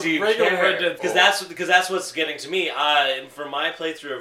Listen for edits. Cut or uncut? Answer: cut